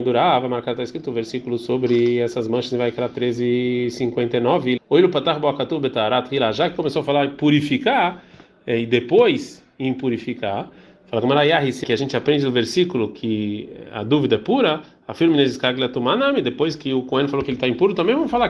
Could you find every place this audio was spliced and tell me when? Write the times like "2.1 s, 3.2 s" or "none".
4.8 s, 11.8 s